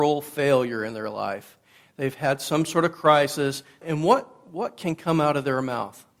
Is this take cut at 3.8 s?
yes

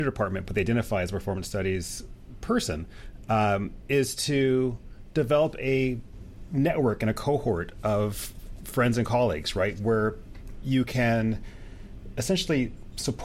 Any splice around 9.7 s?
no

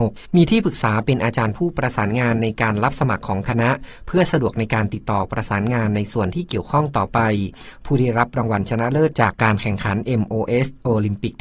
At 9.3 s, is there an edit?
yes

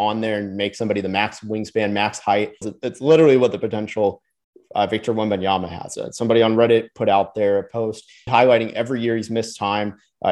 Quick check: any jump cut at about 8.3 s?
yes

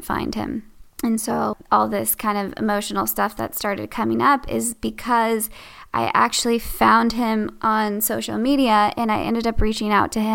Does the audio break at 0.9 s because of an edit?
yes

